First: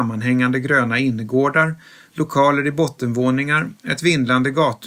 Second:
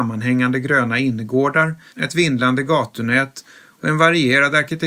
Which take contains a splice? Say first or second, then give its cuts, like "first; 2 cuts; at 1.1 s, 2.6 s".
second; 1 cut; at 1.9 s